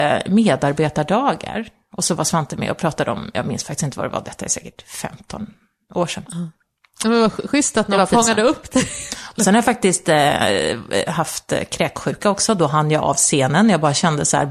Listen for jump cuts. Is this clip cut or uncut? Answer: uncut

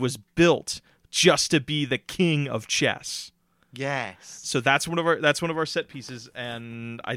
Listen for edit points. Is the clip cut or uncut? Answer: uncut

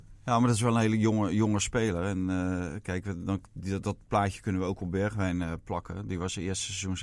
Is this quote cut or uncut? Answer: uncut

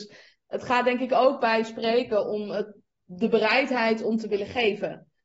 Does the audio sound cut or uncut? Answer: uncut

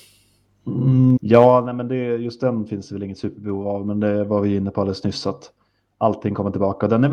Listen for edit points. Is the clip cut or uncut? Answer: cut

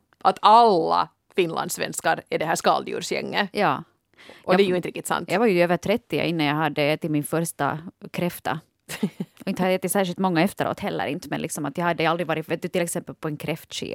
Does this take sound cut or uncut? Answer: uncut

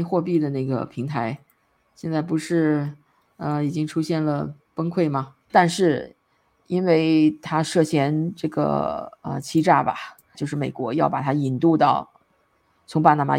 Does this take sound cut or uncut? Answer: cut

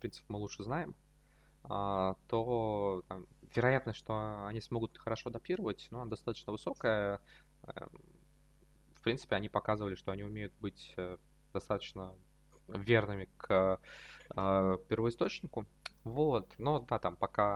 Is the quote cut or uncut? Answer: uncut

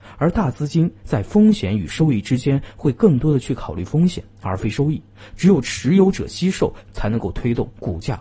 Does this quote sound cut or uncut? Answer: cut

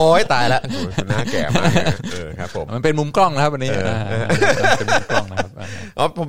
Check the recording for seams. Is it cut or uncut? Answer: cut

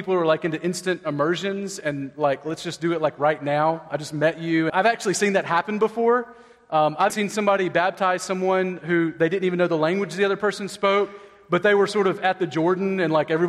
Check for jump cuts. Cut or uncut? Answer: cut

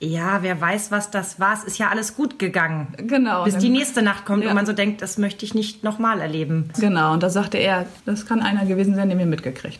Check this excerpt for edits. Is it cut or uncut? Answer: cut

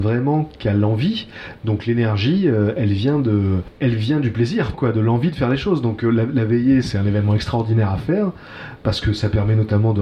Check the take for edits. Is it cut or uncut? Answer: cut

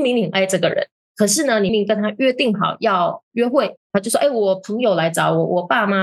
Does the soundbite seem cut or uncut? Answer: cut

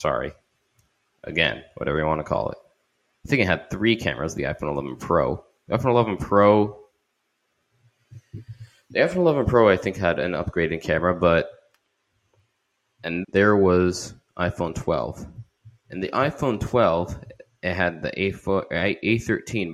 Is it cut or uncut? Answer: cut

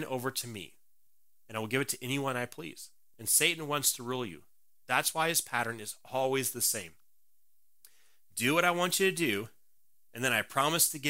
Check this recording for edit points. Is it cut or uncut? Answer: cut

